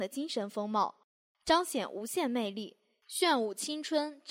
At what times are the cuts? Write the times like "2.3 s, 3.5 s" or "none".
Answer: 3.0 s